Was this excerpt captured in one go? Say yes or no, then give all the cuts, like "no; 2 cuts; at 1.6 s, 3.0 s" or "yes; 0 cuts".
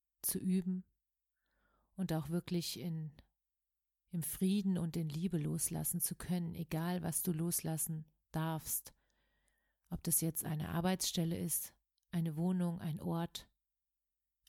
yes; 0 cuts